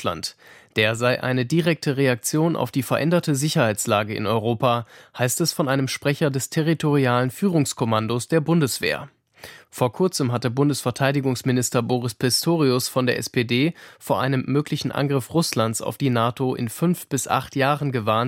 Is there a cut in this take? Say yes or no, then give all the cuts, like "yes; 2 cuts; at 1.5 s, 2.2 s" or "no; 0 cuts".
no; 0 cuts